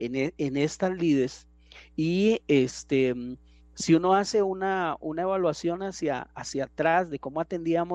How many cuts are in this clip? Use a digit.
0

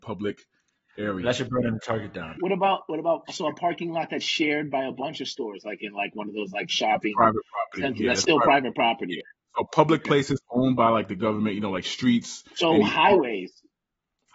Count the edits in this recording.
1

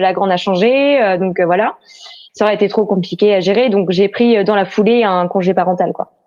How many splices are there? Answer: 1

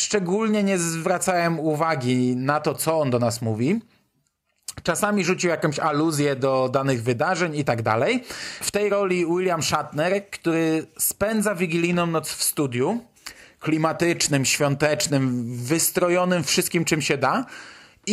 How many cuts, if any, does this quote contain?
1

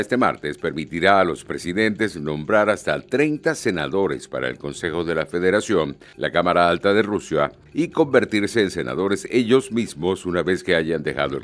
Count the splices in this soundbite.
0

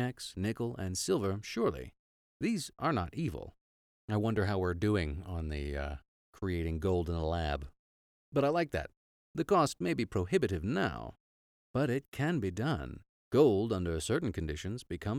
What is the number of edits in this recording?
3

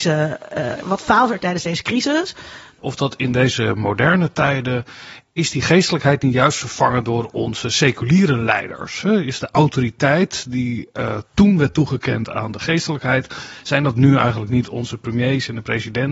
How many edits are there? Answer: 1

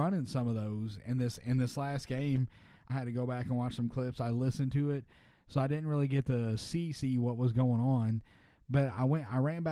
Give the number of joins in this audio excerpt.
1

